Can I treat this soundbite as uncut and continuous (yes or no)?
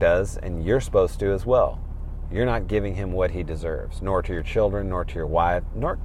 no